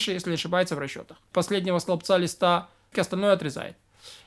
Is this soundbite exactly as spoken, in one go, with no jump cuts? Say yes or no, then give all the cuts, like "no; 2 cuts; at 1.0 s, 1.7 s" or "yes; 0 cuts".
no; 2 cuts; at 1.3 s, 2.9 s